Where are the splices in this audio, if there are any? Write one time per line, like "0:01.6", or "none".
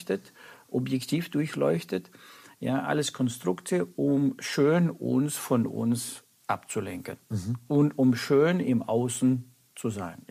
none